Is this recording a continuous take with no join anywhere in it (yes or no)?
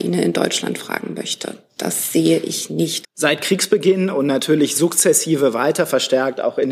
no